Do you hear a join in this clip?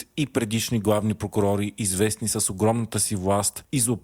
no; 0 cuts

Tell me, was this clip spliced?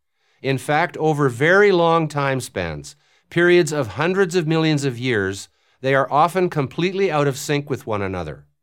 no; 0 cuts

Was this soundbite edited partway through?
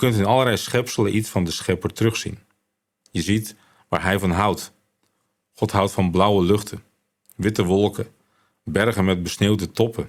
no; 0 cuts

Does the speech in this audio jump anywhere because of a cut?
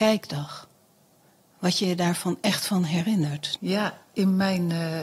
yes; 1 cut; at 3.6 s

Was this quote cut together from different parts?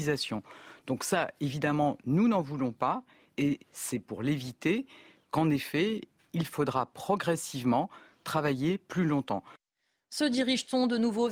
no; 0 cuts

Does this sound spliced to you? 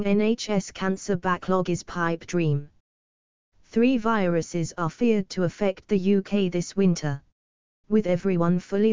yes; 1 cut; at 7.8 s

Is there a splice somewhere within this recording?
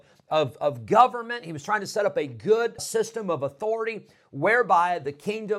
yes; 1 cut; at 2.8 s

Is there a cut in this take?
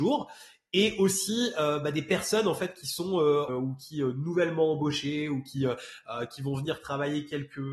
yes; 1 cut; at 3.5 s

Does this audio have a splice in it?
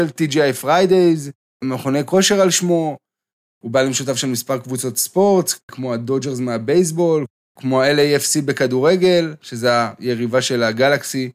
yes; 2 cuts; at 1.6 s, 5.7 s

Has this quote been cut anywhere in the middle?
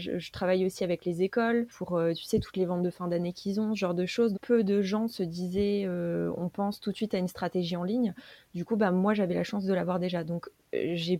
yes; 1 cut; at 4.3 s

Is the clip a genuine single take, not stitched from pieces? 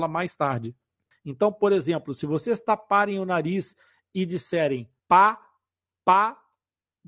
no; 2 cuts; at 1.1 s, 5.0 s

